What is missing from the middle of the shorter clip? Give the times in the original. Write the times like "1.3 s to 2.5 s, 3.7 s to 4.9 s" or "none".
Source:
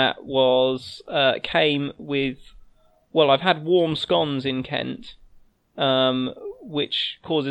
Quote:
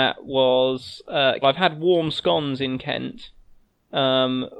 1.4 s to 3.3 s